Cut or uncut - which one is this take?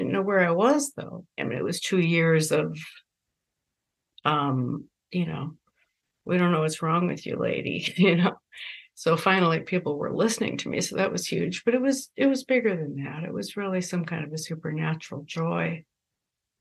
cut